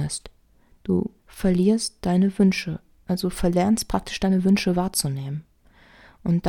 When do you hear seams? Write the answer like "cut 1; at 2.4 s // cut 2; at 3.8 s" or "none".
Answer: cut 1; at 1.2 s

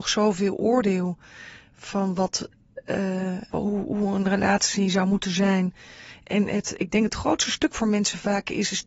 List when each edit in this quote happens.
cut 1; at 3.5 s

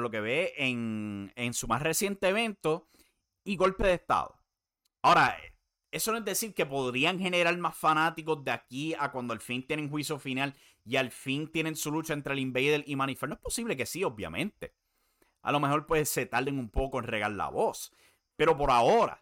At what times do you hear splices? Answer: none

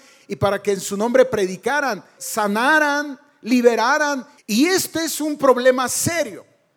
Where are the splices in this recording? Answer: cut 1; at 2.2 s // cut 2; at 4.4 s

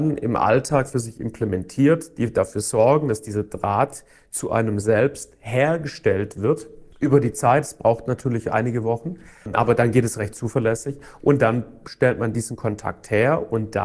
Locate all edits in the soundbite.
none

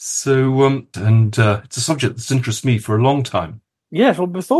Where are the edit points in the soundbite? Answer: cut 1; at 0.9 s

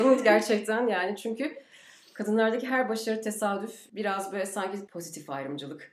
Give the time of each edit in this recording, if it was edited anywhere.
none

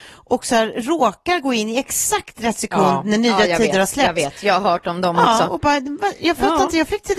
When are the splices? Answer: none

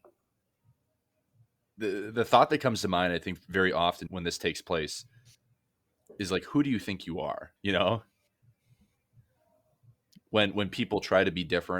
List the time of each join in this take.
cut 1; at 4.1 s // cut 2; at 7.6 s

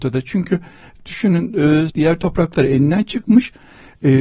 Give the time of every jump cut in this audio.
cut 1; at 1.9 s

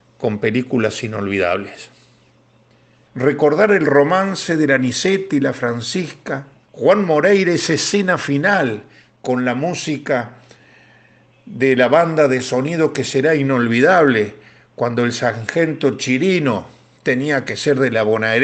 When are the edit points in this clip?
cut 1; at 3.1 s // cut 2; at 6.6 s

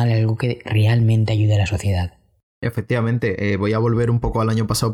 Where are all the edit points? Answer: none

